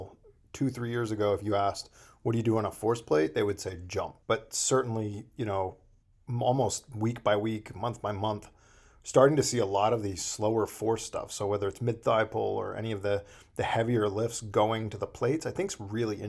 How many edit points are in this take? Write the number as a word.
one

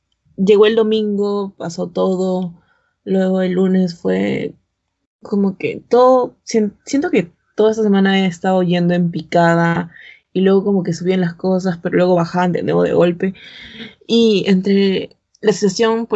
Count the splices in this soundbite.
zero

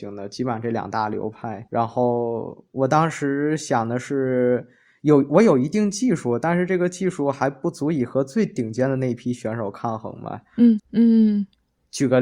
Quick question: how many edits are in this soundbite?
two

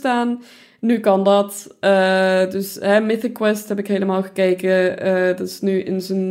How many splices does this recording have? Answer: zero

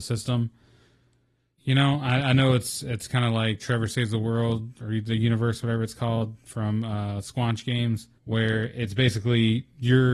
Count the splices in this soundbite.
three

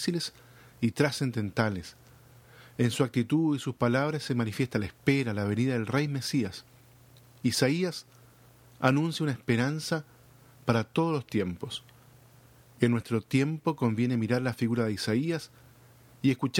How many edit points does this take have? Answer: zero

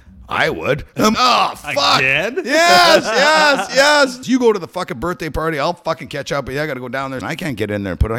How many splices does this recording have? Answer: three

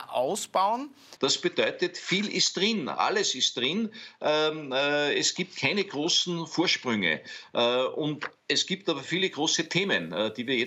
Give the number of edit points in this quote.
one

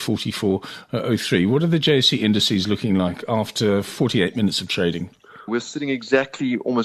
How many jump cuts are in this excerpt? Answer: one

